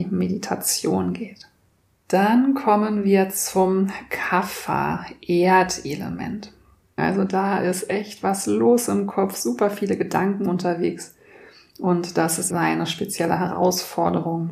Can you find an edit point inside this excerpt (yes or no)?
yes